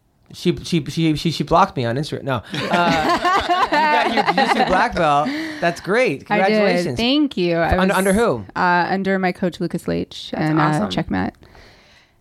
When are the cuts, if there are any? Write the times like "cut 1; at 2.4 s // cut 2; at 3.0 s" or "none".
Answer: none